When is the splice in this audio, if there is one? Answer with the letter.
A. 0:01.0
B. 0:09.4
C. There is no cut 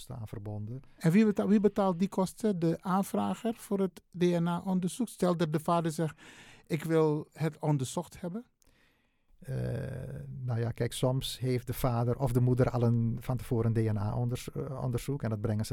C